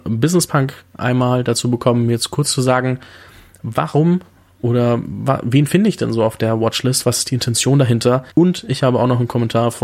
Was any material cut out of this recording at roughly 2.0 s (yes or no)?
no